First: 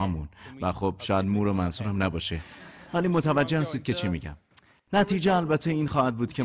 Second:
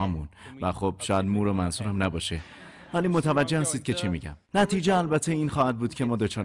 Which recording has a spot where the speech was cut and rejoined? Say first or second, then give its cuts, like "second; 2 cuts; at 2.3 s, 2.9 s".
second; 1 cut; at 4.4 s